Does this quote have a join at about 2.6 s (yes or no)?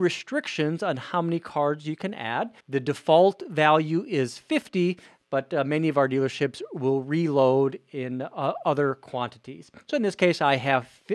yes